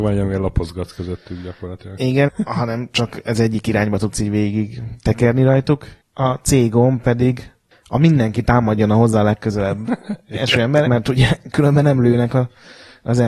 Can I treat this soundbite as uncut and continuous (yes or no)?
no